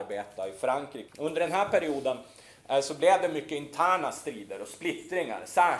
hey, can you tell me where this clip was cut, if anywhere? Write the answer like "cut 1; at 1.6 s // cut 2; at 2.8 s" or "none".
cut 1; at 1.1 s